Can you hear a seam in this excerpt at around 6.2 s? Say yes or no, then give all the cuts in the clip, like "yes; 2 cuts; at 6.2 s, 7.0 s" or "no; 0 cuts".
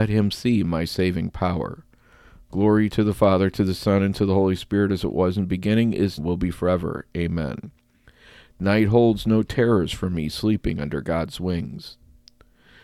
yes; 1 cut; at 6.2 s